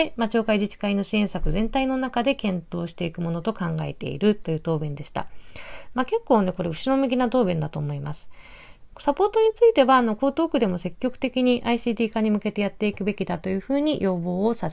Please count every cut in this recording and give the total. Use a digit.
1